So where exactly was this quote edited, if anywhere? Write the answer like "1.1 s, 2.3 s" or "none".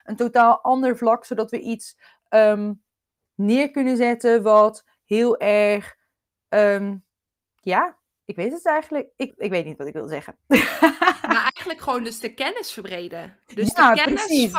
9.3 s